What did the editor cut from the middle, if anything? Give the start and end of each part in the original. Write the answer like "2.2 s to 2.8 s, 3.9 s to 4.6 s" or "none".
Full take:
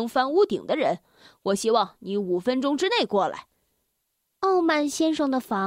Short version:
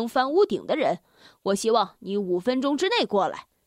none